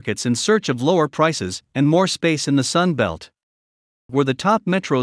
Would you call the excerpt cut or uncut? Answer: cut